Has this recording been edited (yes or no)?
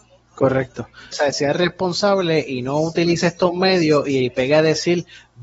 yes